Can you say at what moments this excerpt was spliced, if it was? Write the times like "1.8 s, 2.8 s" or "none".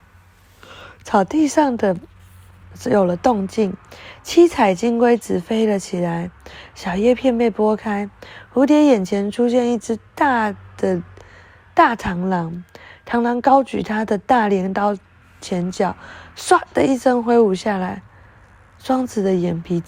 none